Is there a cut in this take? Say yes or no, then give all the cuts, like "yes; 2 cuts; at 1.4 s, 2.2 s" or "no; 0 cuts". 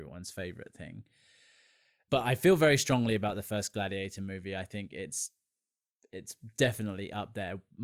no; 0 cuts